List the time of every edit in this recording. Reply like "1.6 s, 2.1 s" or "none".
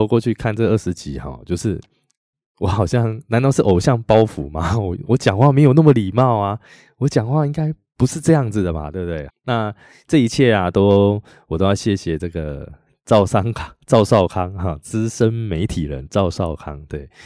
9.3 s